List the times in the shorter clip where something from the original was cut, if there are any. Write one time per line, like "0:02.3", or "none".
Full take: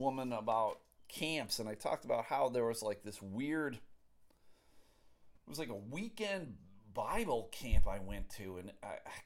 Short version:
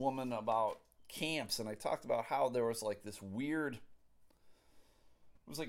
none